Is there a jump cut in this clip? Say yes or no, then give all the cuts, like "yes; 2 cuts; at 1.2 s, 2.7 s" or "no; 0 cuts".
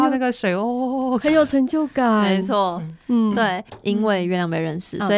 yes; 1 cut; at 3.7 s